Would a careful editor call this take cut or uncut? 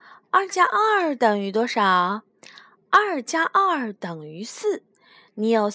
uncut